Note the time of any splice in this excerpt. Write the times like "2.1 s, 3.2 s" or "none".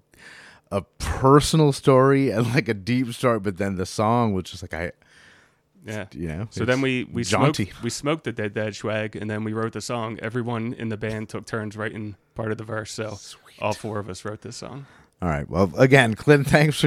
none